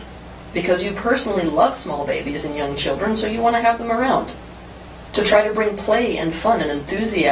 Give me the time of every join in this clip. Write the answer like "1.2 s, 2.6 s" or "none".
5.1 s